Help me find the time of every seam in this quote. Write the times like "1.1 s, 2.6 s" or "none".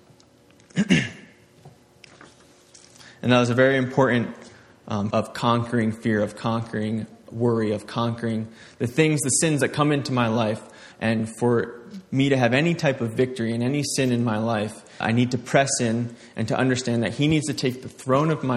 5.1 s, 10.9 s, 15.0 s